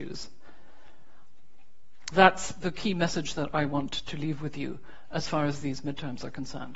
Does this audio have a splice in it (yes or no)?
yes